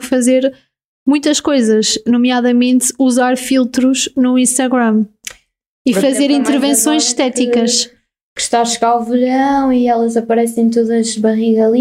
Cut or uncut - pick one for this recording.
uncut